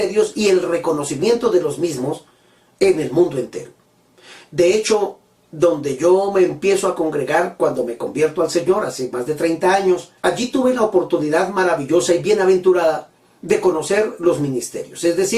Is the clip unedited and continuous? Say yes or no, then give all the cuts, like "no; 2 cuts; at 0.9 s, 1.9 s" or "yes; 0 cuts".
no; 1 cut; at 10.2 s